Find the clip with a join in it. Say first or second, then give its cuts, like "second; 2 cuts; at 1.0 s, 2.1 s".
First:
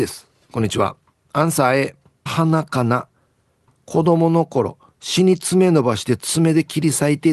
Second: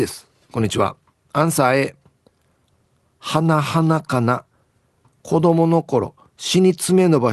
first; 1 cut; at 2.3 s